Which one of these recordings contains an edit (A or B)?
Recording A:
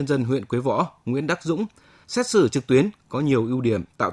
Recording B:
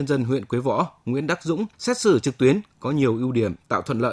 B